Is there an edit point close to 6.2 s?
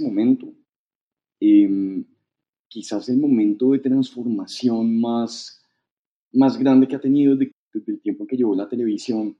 no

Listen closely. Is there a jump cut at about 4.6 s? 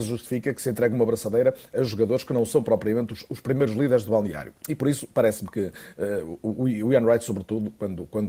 yes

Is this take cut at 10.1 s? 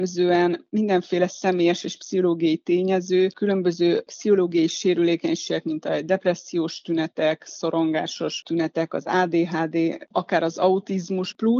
yes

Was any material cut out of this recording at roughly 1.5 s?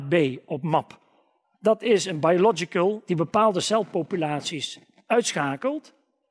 yes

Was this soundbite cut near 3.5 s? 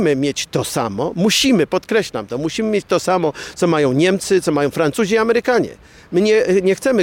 no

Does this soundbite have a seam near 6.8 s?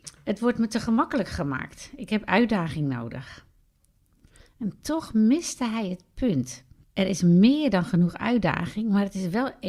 yes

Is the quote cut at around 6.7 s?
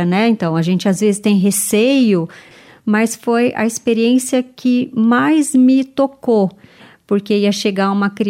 no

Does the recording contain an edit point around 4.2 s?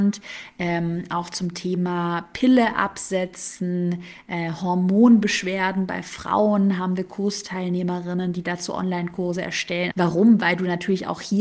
no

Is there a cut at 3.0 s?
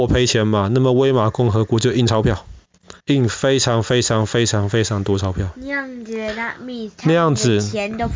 yes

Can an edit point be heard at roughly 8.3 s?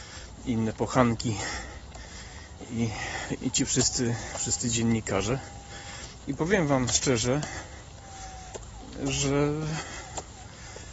no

